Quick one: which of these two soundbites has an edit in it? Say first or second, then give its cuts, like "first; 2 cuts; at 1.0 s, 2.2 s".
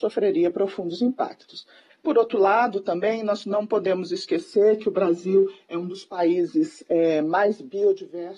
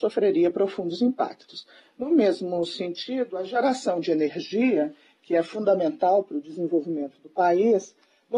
first; 1 cut; at 1.9 s